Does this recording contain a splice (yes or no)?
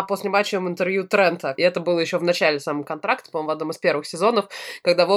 yes